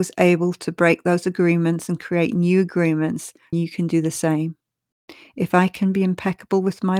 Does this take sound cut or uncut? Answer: cut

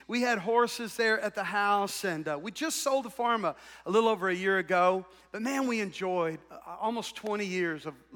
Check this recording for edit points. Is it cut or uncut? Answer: uncut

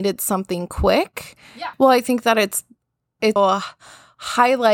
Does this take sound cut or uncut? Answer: cut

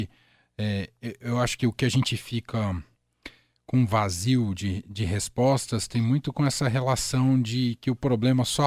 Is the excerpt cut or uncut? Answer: uncut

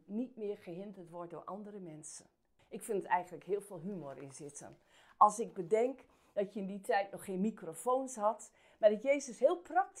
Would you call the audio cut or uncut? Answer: cut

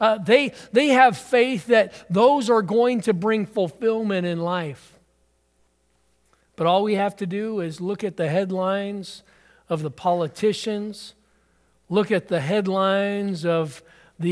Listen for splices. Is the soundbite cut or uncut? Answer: uncut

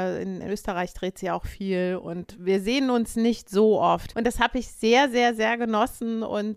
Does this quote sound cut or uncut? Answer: cut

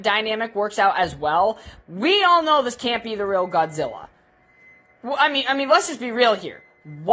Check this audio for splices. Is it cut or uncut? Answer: cut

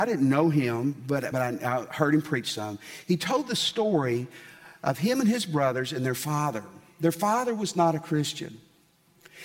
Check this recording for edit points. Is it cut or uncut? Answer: uncut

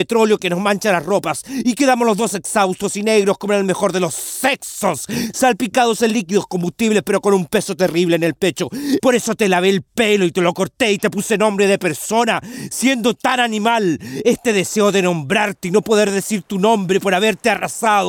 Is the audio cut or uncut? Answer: cut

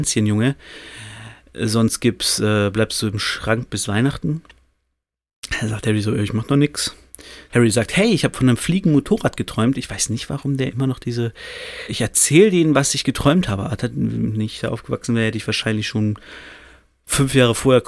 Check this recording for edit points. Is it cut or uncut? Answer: cut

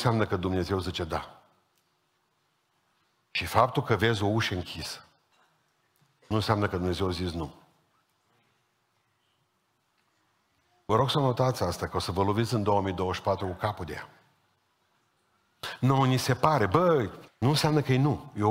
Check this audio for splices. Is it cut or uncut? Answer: cut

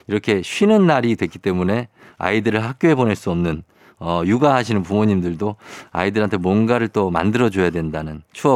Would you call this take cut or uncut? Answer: uncut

